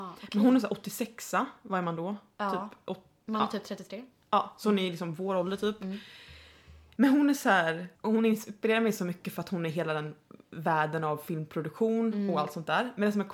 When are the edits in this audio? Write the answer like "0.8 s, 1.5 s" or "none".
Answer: 8.0 s